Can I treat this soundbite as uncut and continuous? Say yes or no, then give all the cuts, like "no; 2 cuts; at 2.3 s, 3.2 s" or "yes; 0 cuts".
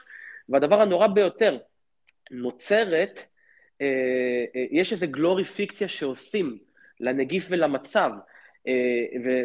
yes; 0 cuts